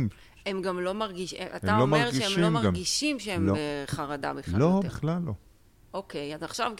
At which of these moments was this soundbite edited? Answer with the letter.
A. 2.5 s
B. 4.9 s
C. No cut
C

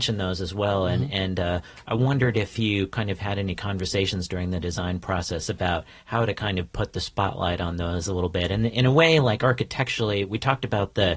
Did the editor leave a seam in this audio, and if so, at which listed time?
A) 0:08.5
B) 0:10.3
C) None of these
C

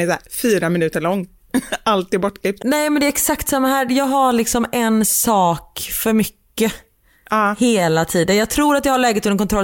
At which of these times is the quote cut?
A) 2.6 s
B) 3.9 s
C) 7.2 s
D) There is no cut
A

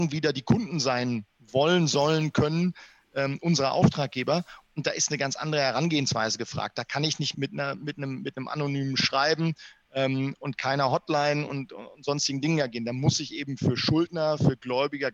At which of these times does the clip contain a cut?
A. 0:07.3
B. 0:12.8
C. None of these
A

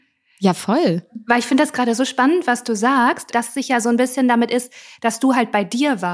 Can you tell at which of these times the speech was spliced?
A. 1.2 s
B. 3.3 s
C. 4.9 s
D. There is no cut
B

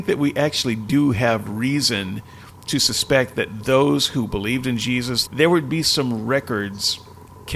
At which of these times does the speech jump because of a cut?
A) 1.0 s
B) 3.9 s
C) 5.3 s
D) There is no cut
C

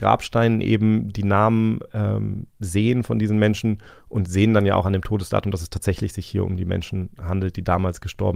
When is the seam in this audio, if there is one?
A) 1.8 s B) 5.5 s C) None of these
C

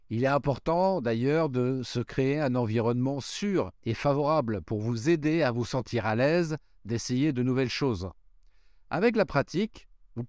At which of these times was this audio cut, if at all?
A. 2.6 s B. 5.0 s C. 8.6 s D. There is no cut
D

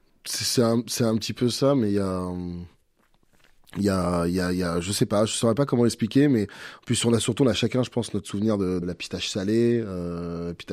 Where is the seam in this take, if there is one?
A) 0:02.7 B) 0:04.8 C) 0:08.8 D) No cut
C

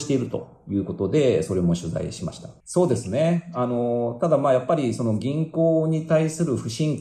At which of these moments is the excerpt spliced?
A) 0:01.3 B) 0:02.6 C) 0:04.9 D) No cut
B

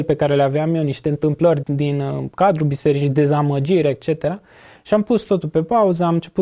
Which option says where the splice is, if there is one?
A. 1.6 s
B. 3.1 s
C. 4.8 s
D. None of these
A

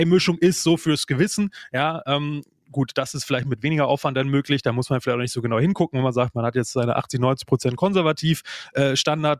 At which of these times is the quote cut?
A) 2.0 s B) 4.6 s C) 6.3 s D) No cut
D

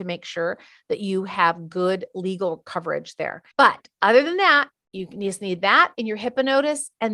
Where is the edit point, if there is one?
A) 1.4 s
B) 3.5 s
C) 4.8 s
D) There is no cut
B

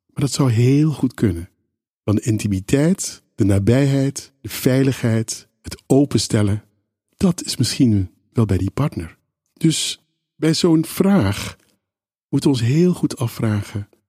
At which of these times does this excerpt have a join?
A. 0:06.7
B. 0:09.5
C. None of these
C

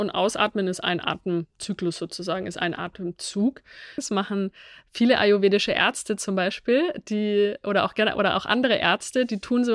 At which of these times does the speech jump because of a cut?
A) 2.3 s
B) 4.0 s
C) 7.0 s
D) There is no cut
B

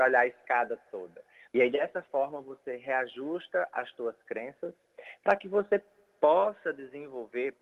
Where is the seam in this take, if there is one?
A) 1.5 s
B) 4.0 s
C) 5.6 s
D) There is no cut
A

